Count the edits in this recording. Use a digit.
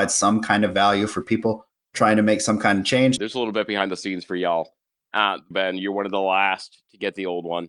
2